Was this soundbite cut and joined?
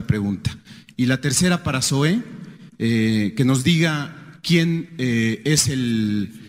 no; 0 cuts

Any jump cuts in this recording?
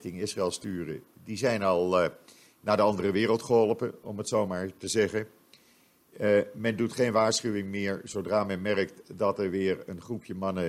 no; 0 cuts

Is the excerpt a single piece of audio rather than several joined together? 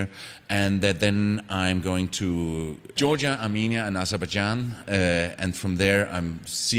yes; 0 cuts

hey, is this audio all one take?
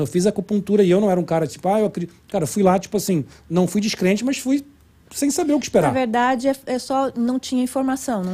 yes; 0 cuts

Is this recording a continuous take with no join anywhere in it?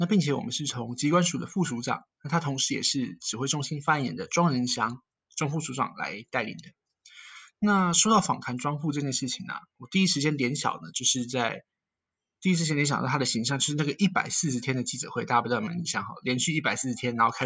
yes; 0 cuts

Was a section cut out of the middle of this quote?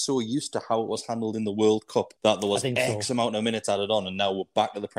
yes; 1 cut; at 2.2 s

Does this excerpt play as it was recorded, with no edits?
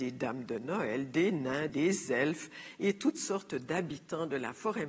no; 1 cut; at 1.7 s

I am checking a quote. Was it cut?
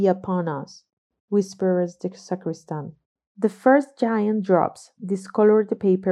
no; 0 cuts

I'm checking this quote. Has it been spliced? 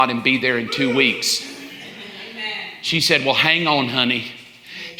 no; 0 cuts

